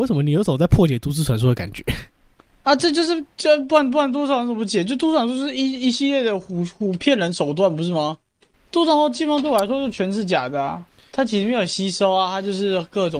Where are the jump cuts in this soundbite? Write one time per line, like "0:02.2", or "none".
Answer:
0:11.1